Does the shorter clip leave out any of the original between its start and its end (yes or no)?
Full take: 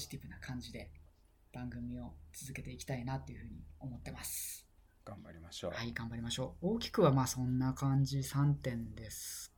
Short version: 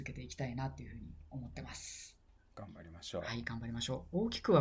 no